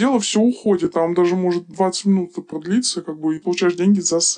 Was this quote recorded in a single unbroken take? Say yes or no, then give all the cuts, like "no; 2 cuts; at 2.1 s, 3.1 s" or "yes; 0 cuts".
no; 1 cut; at 3.4 s